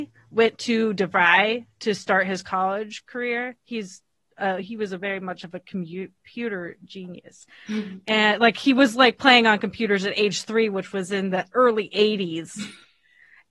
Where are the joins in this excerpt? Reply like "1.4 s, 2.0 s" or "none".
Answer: 7.5 s